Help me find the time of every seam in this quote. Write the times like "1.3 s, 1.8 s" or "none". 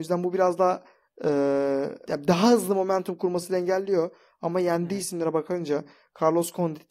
2.0 s